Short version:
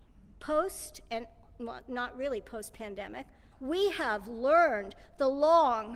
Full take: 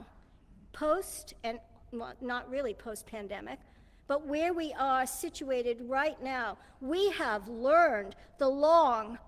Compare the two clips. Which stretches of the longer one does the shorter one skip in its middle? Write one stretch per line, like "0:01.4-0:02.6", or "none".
0:03.8-0:06.7